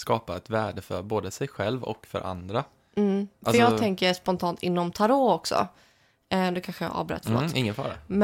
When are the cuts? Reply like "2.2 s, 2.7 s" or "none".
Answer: none

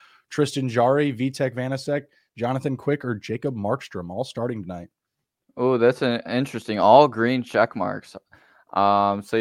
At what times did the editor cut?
none

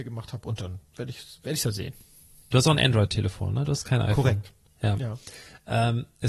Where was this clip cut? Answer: 2.4 s

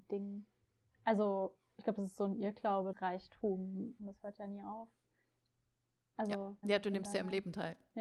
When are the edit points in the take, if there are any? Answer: 2.9 s, 4.0 s, 6.6 s

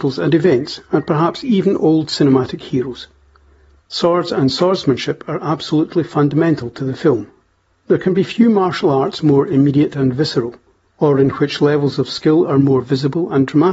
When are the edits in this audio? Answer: 3.8 s

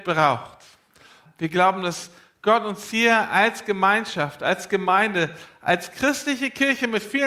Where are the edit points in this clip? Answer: 1.3 s

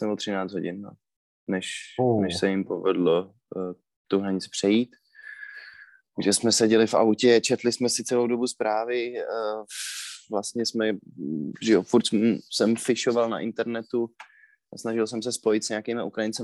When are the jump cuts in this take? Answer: none

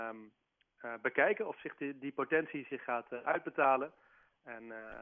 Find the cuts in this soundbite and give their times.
none

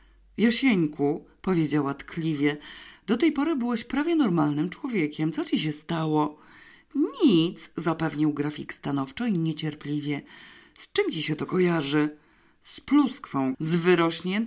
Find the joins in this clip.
13.5 s

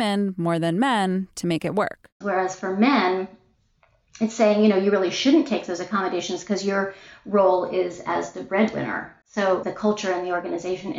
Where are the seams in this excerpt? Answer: 2.2 s, 9.2 s

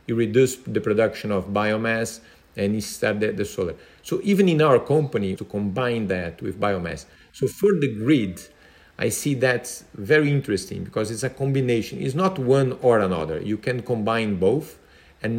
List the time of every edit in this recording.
5.4 s

